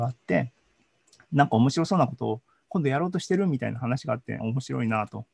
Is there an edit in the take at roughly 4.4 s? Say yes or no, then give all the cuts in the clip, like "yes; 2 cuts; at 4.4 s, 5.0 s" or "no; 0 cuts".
yes; 1 cut; at 4.4 s